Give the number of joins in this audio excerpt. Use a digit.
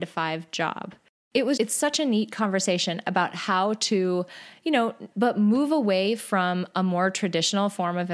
2